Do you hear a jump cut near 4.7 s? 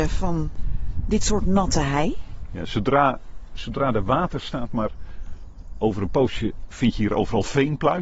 yes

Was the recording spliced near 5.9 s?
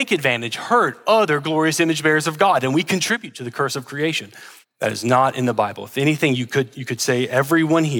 no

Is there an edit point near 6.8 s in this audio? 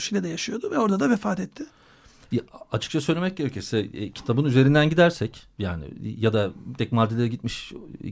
yes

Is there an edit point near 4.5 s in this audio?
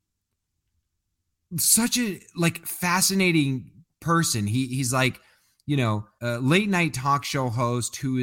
no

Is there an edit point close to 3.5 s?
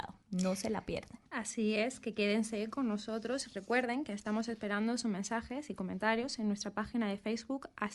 no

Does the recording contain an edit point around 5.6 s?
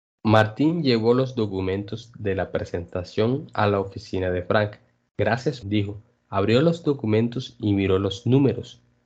yes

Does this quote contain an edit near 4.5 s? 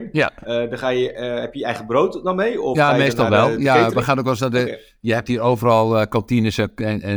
no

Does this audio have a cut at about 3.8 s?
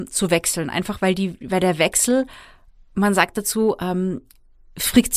no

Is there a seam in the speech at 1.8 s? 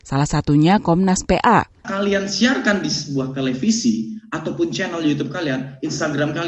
yes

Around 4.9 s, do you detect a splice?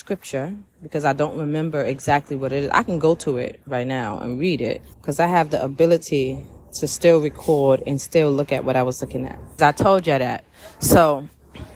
yes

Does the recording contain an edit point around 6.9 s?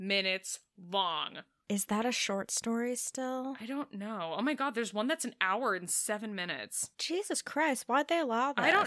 no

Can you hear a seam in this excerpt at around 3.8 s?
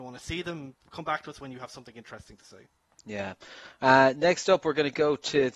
no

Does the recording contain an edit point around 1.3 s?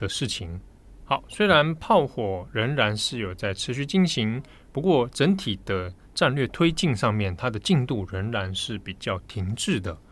yes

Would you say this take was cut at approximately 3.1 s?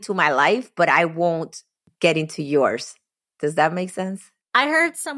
no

